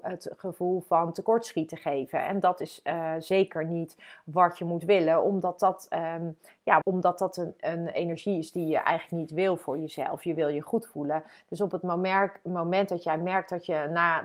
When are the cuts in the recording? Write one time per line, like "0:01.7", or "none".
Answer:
0:06.8